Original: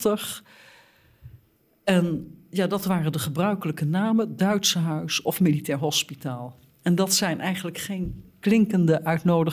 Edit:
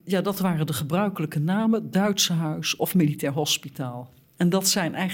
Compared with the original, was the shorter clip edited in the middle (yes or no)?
no